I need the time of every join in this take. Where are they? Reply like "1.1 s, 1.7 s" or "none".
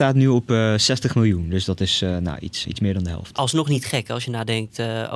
2.6 s

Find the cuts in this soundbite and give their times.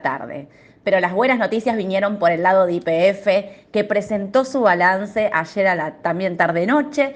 none

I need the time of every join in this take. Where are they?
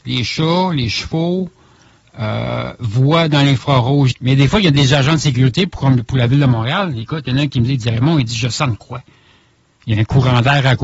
4.1 s

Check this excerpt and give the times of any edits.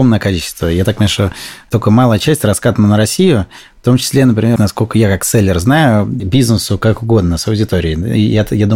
4.6 s, 6.2 s

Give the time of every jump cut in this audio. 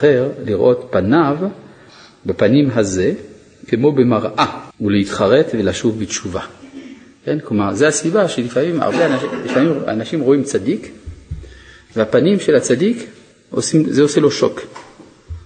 4.7 s

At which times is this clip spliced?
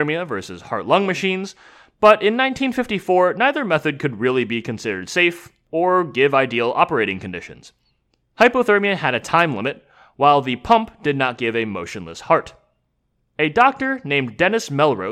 none

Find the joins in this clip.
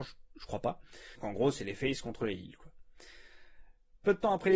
1.2 s

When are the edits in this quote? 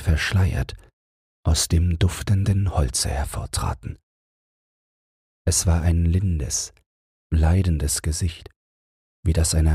none

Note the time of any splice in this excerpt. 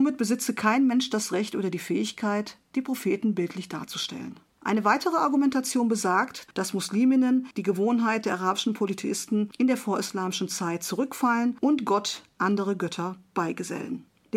6.5 s

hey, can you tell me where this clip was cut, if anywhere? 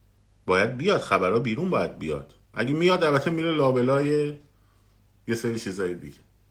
2.4 s

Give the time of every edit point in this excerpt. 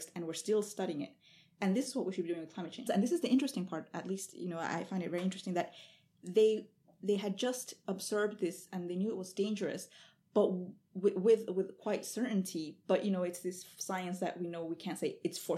2.9 s

